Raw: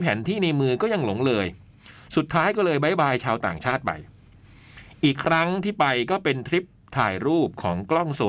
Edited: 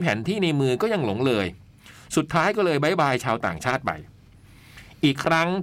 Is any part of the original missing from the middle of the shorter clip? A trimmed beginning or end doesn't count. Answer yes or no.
no